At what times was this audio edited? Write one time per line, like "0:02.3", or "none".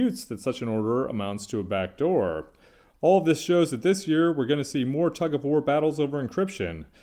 none